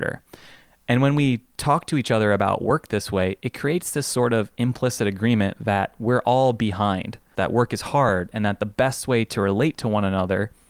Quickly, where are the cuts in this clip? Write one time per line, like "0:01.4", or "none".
0:07.3